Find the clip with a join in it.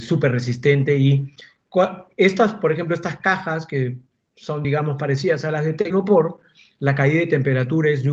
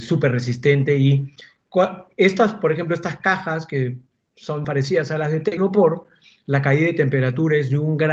second; 1 cut; at 4.6 s

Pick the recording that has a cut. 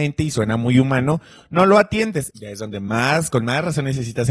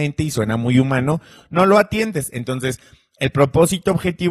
first; 1 cut; at 2.3 s

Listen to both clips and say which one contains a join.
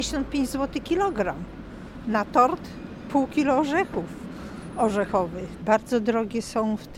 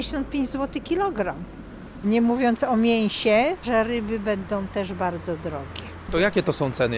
second; 2 cuts; at 2.0 s, 3.6 s

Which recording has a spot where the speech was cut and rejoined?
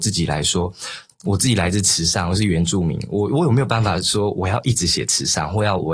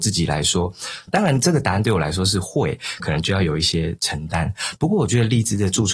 second; 2 cuts; at 1.1 s, 3.0 s

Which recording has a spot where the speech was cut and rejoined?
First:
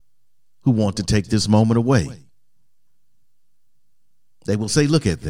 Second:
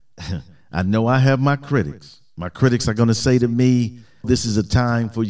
second; 1 cut; at 4.2 s

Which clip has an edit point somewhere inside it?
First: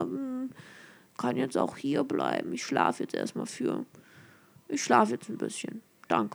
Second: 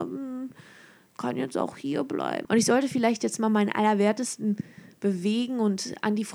second; 1 cut; at 2.4 s

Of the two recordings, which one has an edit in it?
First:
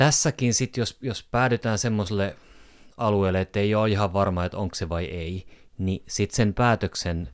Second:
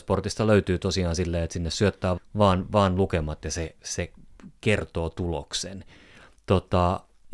second; 1 cut; at 2.2 s

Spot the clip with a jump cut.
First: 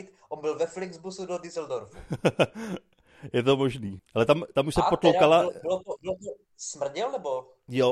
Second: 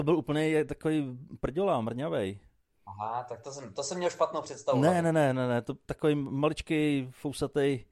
first; 1 cut; at 4.0 s

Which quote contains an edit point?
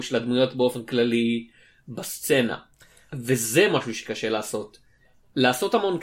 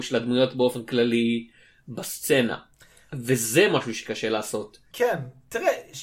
second; 1 cut; at 4.9 s

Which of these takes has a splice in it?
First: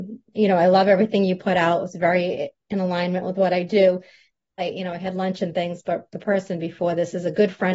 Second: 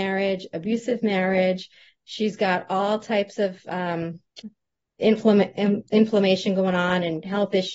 first; 1 cut; at 4.6 s

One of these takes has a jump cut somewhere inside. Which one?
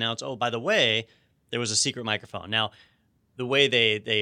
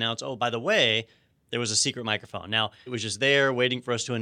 second; 1 cut; at 2.9 s

